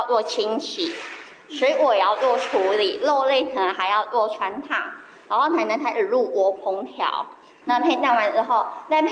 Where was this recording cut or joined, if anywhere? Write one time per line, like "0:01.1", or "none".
0:07.6